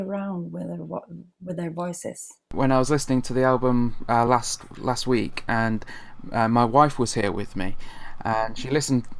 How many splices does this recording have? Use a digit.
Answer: 0